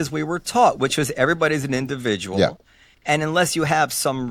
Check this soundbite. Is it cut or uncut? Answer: uncut